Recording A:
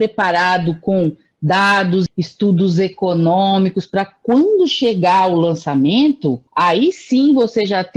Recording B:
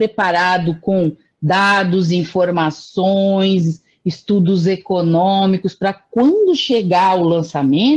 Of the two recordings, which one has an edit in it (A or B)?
A